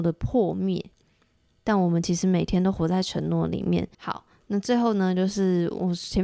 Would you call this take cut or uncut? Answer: cut